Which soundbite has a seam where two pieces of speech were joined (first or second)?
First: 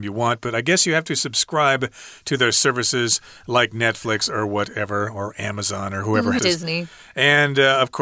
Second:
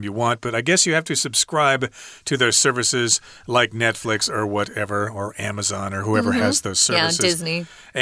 first